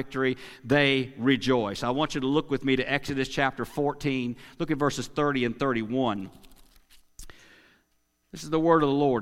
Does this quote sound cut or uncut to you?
uncut